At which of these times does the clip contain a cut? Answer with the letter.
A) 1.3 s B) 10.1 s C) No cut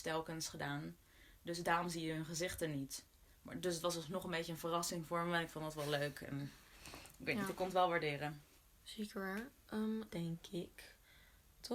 B